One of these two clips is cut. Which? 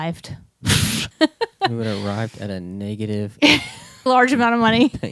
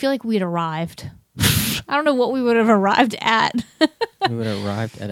first; 2 cuts; at 1.1 s, 4.1 s

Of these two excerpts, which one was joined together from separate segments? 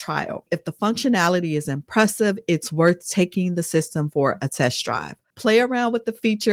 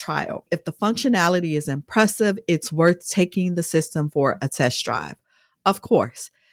first; 1 cut; at 5.3 s

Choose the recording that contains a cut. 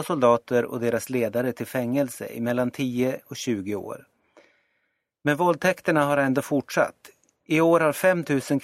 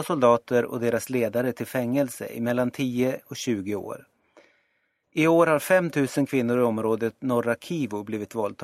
second; 1 cut; at 5.0 s

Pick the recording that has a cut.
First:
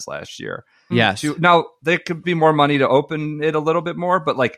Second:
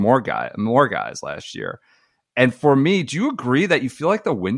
first; 2 cuts; at 0.9 s, 2.2 s

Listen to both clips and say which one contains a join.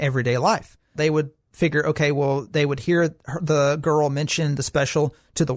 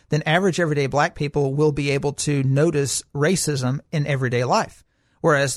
first; 1 cut; at 0.9 s

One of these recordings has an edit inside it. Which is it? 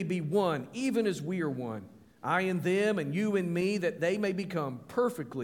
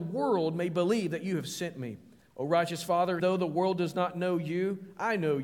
second; 2 cuts; at 2.2 s, 3.2 s

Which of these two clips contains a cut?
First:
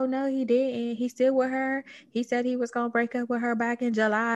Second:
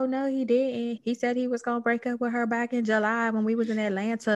second; 1 cut; at 1.0 s

